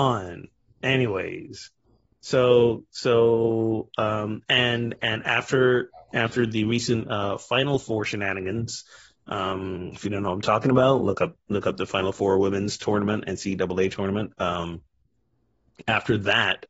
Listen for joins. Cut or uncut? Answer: uncut